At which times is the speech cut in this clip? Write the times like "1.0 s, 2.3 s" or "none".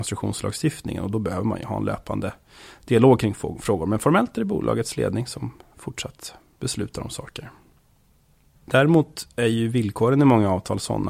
8.5 s